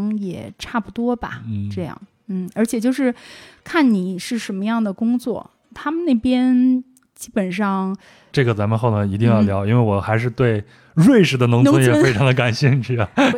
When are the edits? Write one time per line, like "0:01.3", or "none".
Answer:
0:08.3